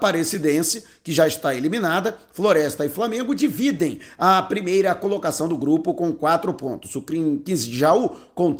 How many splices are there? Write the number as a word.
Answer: zero